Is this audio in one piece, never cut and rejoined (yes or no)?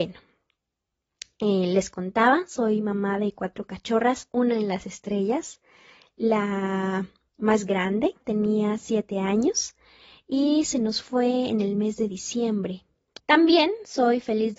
no